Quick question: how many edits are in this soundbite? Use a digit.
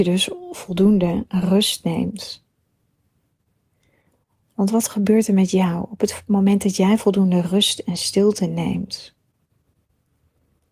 0